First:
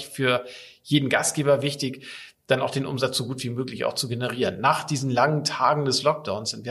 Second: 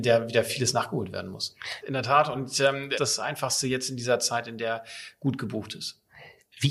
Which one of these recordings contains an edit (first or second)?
second